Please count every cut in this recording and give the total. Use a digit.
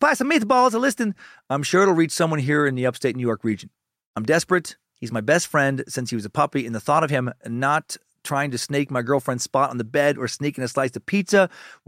0